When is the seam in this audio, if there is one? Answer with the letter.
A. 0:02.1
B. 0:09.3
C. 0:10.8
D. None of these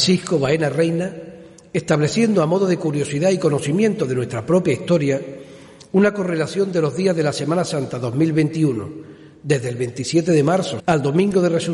C